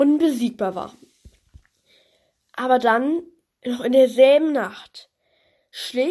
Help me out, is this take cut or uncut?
uncut